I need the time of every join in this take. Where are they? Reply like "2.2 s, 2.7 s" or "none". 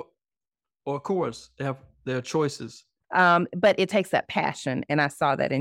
3.0 s